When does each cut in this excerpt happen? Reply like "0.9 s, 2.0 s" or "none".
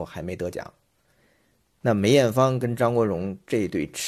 1.2 s